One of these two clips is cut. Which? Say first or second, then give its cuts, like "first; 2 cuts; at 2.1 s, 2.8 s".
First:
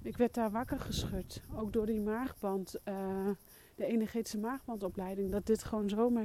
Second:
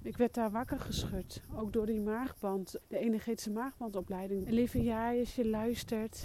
second; 2 cuts; at 2.8 s, 4.4 s